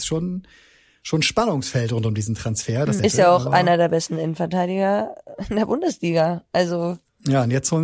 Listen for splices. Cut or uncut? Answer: cut